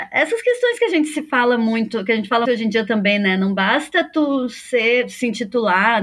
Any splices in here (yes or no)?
yes